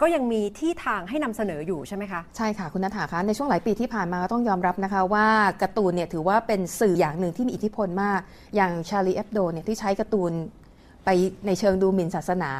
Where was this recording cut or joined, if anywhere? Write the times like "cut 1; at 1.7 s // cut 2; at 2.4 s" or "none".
cut 1; at 7.0 s